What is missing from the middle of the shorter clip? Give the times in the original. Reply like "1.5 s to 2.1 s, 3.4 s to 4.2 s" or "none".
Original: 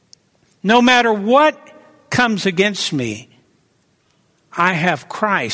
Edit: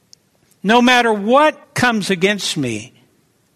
1.6 s to 2.0 s